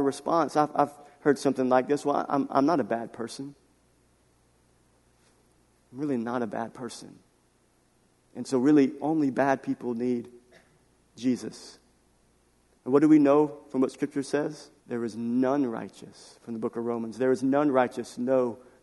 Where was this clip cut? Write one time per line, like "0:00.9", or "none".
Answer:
0:14.8